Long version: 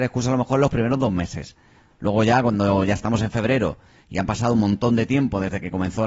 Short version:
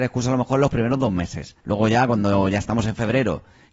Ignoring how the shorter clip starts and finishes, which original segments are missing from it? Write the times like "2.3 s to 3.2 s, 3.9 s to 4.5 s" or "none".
1.6 s to 1.9 s